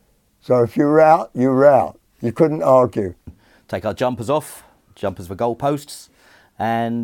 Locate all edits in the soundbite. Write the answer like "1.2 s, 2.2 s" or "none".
none